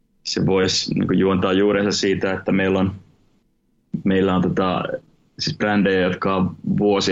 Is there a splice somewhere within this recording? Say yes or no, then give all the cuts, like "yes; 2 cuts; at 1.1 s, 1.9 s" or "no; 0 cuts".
no; 0 cuts